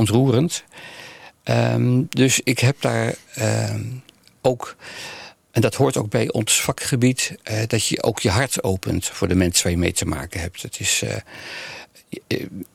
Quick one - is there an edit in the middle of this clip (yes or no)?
no